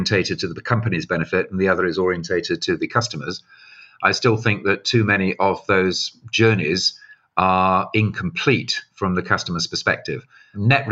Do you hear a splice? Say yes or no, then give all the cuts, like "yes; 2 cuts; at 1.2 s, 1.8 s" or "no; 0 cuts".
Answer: no; 0 cuts